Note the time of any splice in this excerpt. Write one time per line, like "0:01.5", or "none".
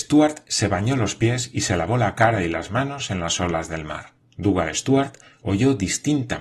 0:04.2